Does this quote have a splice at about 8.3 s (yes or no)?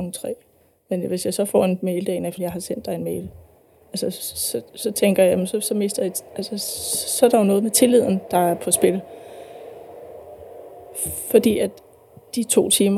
no